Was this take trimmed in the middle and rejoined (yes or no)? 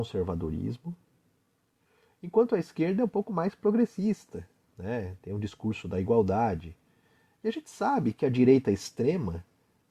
yes